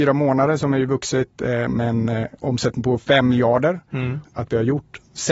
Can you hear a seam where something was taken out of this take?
yes; 1 cut; at 4.2 s

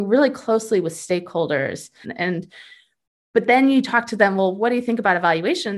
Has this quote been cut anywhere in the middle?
yes; 1 cut; at 2.0 s

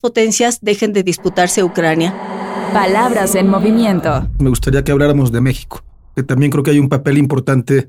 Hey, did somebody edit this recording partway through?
no; 0 cuts

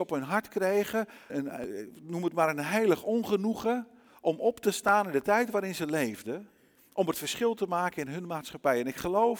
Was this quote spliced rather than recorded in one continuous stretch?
yes; 1 cut; at 1.3 s

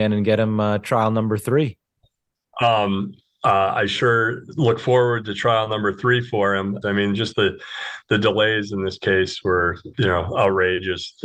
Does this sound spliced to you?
yes; 2 cuts; at 6.8 s, 9.9 s

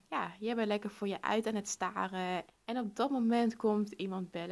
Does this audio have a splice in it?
yes; 1 cut; at 2.5 s

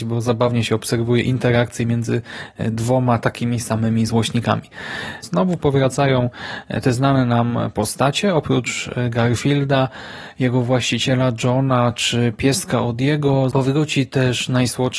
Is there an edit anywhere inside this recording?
yes; 2 cuts; at 5.2 s, 13.5 s

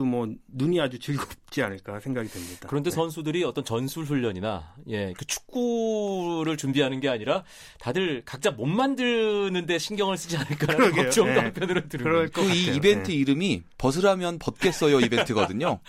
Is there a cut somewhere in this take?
no; 0 cuts

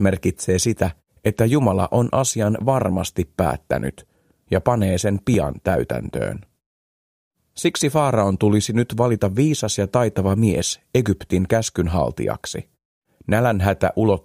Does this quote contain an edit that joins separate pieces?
yes; 1 cut; at 13.1 s

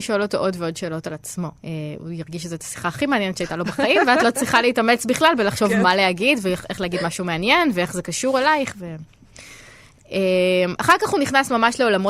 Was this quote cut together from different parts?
yes; 1 cut; at 1.6 s

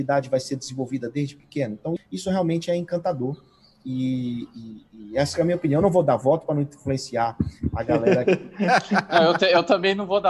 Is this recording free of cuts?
no; 1 cut; at 2.0 s

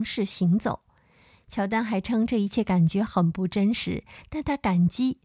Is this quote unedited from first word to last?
yes; 0 cuts

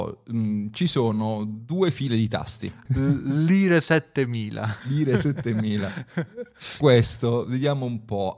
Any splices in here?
yes; 2 cuts; at 2.9 s, 6.8 s

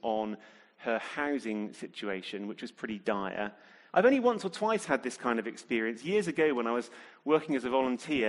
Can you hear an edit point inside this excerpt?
yes; 1 cut; at 3.9 s

